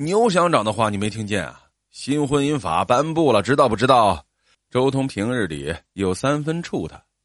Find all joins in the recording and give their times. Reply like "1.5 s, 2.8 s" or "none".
4.5 s